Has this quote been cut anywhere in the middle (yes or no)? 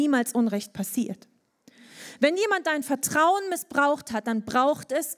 no